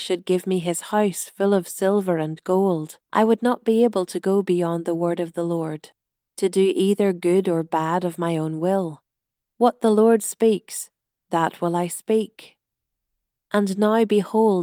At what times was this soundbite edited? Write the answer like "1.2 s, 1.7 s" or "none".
3.0 s